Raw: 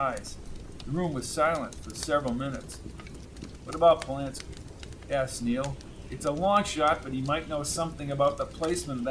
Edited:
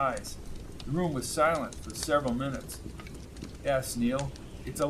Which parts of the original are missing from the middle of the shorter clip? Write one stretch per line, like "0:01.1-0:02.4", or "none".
0:03.6-0:05.0